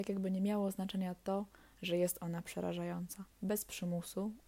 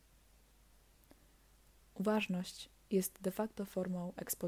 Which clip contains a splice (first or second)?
first